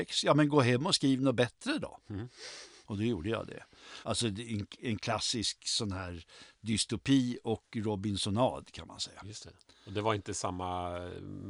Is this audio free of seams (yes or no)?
no